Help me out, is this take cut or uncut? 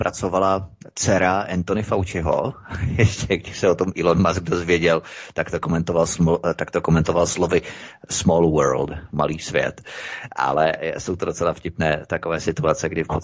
uncut